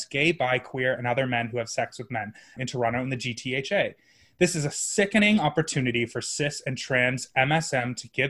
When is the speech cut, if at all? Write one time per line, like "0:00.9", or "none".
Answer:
0:02.6